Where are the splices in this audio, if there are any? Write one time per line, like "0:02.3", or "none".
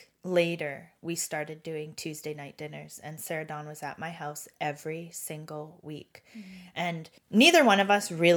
0:07.2